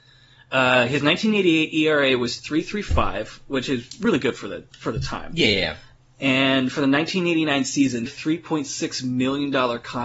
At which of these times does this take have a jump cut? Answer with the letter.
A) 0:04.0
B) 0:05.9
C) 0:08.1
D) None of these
C